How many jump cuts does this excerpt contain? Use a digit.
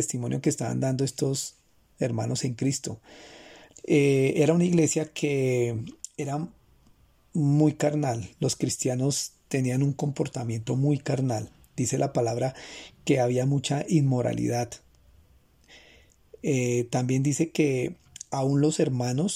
1